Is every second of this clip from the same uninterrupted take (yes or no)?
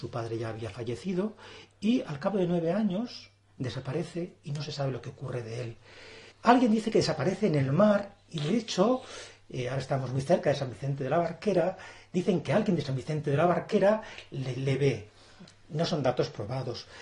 no